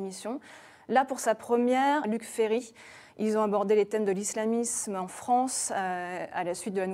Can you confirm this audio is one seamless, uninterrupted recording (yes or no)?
no